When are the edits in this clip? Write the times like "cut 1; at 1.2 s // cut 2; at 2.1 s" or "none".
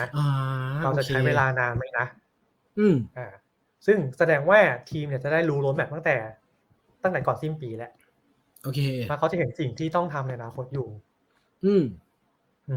none